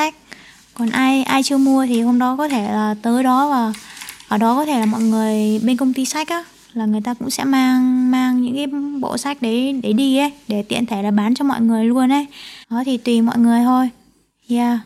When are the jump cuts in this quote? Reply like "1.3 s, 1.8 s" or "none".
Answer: 12.6 s